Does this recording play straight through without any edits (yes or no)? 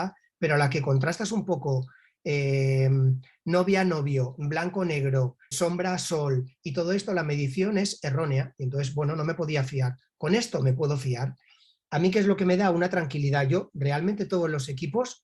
no